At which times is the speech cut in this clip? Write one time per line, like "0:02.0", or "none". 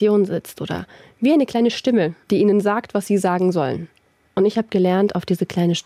0:02.2